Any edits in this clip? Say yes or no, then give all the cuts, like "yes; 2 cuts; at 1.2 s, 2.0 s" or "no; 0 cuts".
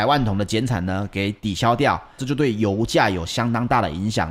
yes; 1 cut; at 2.2 s